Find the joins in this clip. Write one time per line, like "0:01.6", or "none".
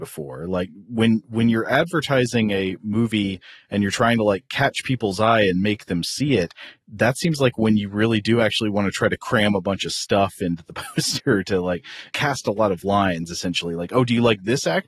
none

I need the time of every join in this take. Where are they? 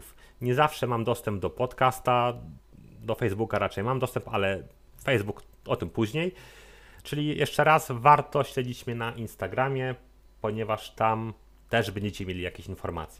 0:07.0

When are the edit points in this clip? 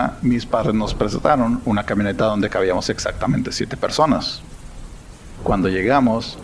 0:05.4

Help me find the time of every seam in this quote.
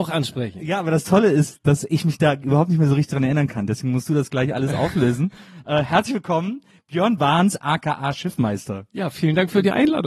0:07.6

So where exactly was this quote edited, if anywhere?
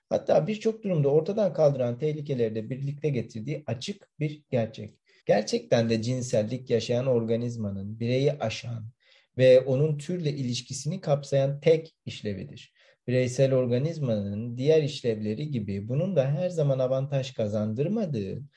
0:05.2

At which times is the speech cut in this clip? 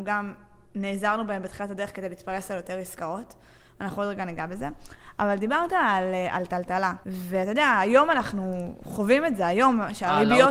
0:07.0

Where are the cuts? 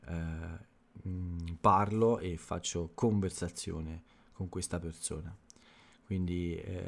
none

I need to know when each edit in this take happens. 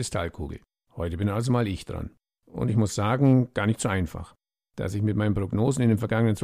none

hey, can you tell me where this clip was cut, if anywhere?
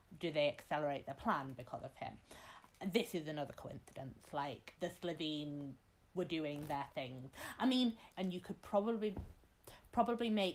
0:04.8
0:08.1

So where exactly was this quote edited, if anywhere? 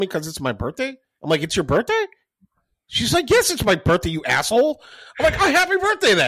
none

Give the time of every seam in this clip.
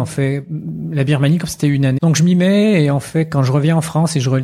0:02.0

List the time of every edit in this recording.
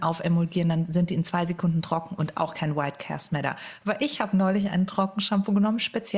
none

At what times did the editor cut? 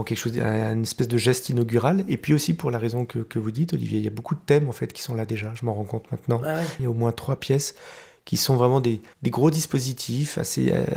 0:06.8
0:09.1

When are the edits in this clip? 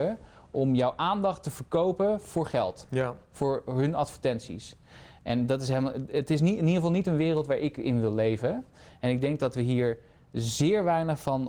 none

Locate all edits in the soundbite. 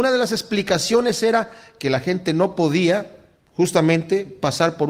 none

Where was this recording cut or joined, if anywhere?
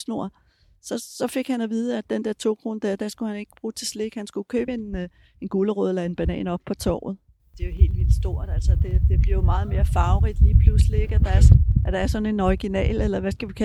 none

